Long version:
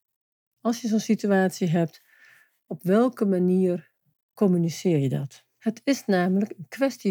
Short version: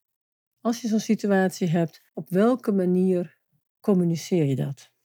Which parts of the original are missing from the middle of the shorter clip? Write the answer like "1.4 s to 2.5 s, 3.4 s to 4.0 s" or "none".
2.1 s to 2.6 s